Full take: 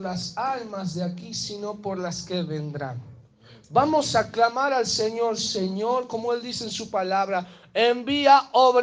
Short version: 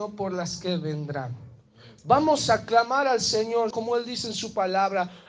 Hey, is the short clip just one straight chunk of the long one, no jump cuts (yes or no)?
no